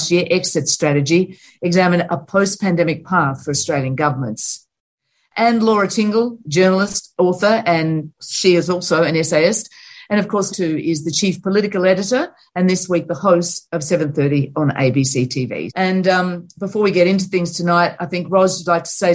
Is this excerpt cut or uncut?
cut